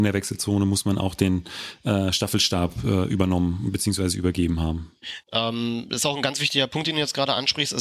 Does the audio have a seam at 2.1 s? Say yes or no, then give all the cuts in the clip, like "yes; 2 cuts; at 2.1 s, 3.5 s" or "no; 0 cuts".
no; 1 cut; at 5.2 s